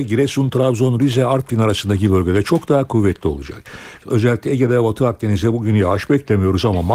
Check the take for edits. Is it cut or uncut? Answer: cut